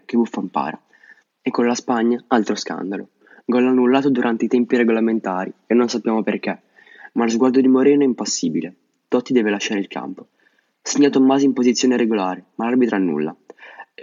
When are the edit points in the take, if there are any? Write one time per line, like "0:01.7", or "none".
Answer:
0:01.2
0:07.1